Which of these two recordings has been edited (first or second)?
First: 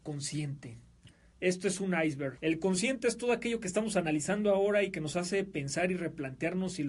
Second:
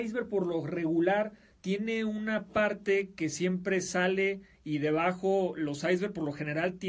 first